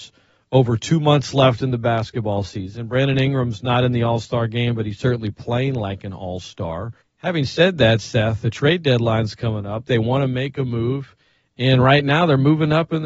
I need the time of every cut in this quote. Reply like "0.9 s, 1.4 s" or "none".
7.0 s, 9.9 s